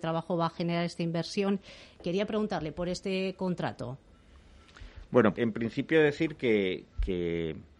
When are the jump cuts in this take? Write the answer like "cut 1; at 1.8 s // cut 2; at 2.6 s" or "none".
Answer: cut 1; at 5.3 s